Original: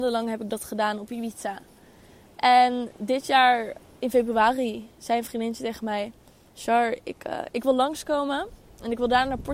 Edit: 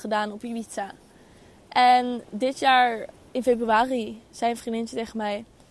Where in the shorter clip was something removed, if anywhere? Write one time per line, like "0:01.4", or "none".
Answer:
none